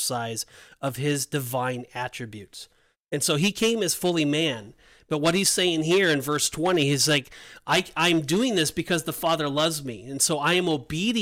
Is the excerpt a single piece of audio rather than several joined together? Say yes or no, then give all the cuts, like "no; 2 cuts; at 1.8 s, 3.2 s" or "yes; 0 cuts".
yes; 0 cuts